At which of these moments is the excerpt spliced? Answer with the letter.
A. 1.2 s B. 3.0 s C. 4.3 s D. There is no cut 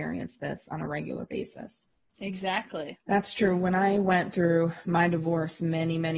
B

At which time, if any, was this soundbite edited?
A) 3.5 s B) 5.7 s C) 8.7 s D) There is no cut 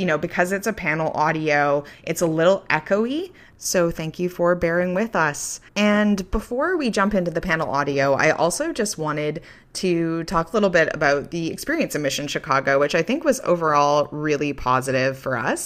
B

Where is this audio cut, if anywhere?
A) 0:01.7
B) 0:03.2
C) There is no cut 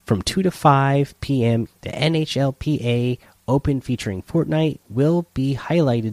A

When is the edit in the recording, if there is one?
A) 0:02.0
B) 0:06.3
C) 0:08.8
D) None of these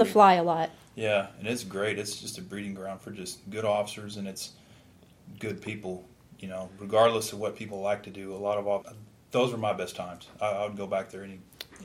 C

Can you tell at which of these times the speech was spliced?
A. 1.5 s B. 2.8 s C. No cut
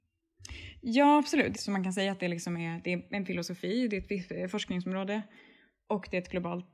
A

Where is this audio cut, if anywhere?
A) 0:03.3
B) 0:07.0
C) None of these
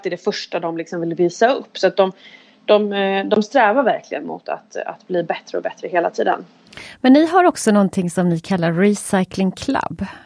C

